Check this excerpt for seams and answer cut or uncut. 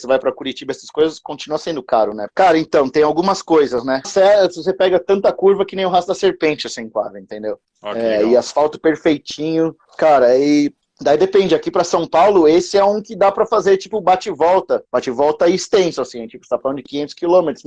cut